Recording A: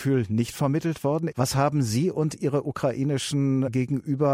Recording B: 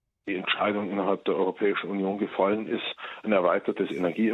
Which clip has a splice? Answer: A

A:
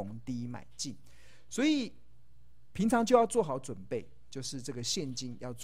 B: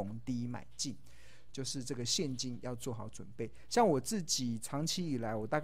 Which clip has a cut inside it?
B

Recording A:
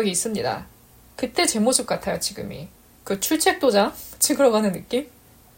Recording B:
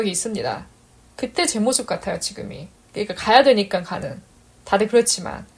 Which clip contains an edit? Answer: B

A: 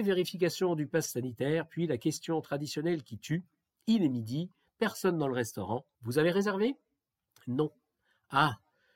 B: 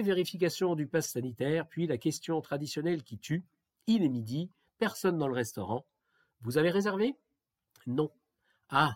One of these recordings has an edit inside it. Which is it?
A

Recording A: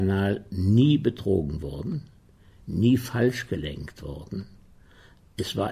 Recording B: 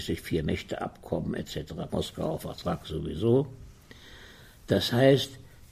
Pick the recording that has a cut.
B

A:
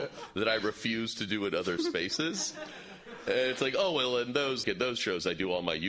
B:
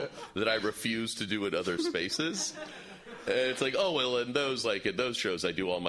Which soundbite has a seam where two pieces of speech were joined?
A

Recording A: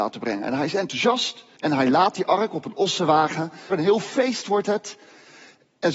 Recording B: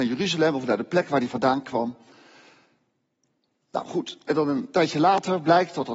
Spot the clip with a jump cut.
A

